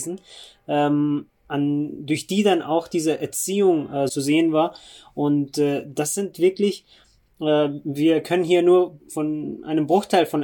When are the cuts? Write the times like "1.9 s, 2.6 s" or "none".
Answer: 4.1 s